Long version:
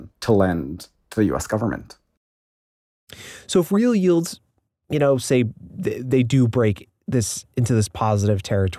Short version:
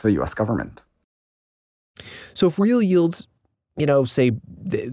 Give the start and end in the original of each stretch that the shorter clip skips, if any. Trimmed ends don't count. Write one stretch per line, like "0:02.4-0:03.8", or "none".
none